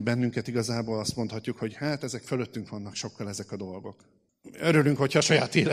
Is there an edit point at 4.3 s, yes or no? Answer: yes